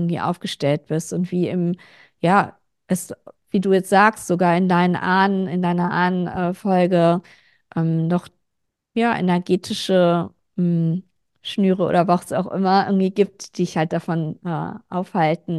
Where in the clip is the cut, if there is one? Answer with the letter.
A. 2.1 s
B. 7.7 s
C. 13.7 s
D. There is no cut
D